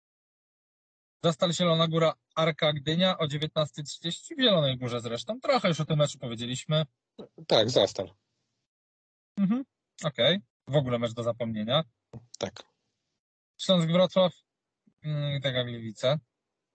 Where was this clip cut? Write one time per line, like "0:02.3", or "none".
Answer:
0:10.5